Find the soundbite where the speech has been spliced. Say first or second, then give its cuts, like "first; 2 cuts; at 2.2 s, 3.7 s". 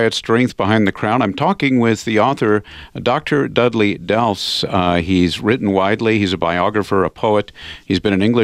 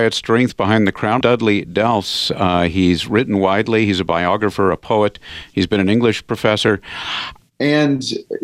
second; 2 cuts; at 1.2 s, 7.4 s